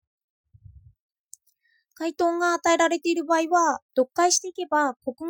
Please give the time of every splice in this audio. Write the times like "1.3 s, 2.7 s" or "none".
3.9 s